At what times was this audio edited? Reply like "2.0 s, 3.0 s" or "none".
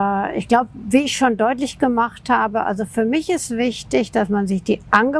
none